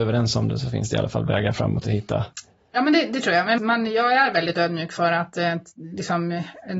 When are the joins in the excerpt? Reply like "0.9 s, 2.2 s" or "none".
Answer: 3.6 s